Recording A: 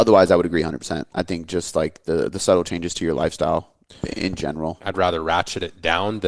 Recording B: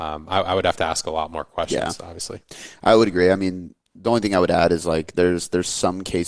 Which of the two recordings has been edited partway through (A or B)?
A